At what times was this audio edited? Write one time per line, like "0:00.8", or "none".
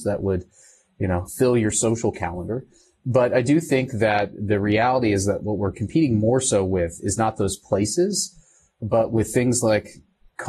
none